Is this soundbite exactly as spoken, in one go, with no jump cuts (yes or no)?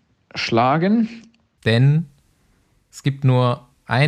no